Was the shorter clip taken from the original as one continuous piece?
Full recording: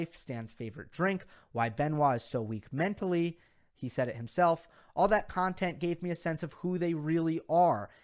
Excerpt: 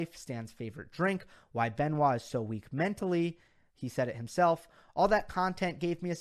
yes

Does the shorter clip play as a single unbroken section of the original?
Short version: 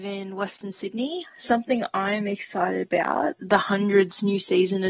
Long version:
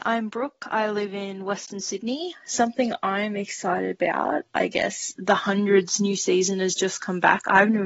no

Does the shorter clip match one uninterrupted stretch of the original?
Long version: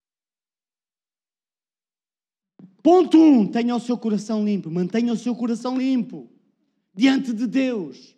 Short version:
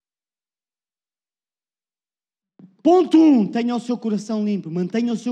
yes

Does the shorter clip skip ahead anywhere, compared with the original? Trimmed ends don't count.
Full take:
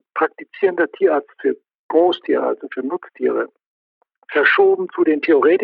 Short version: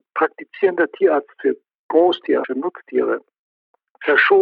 yes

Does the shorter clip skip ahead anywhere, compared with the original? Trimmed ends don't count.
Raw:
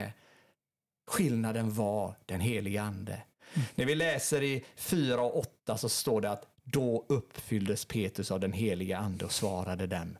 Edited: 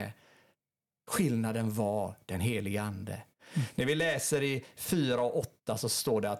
no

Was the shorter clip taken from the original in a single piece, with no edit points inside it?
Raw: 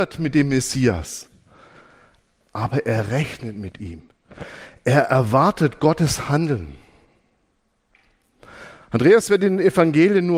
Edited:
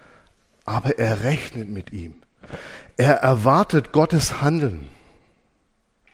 yes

